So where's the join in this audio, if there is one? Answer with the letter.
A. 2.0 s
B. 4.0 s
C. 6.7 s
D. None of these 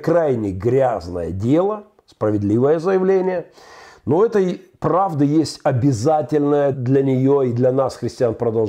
C